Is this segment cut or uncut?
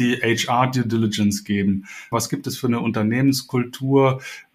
cut